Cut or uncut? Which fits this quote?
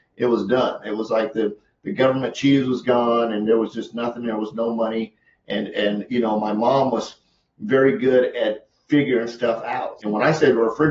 cut